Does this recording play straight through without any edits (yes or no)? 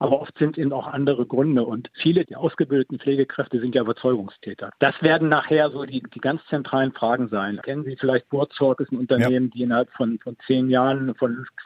no